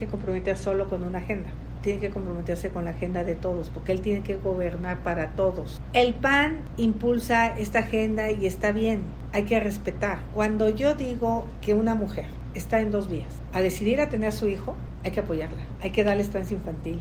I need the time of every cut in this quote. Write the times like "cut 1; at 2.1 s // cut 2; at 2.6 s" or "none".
cut 1; at 1.7 s